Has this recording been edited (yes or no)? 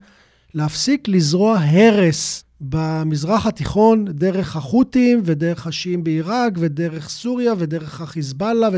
no